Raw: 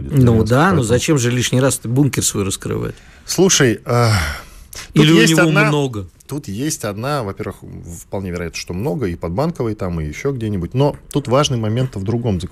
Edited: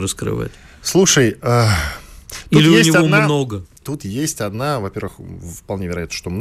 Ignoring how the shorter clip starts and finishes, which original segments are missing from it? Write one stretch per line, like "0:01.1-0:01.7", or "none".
none